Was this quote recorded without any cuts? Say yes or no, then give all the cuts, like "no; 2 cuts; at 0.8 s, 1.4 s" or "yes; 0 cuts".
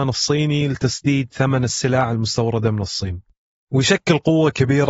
no; 1 cut; at 3.6 s